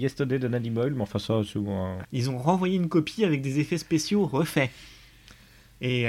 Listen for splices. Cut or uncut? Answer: cut